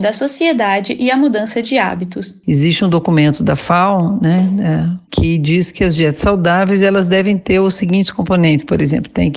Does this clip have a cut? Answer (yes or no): no